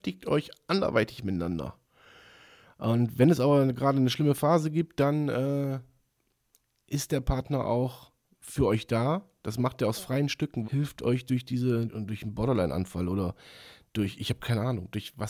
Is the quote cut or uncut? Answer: cut